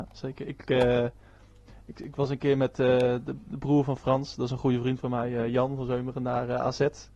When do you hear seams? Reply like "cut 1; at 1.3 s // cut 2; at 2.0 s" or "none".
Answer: none